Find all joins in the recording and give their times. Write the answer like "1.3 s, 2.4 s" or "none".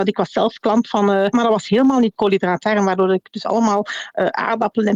1.3 s